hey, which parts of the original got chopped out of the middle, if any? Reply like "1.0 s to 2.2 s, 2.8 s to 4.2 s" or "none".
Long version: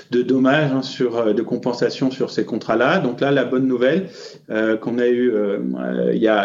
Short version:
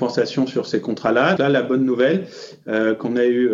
3.0 s to 3.2 s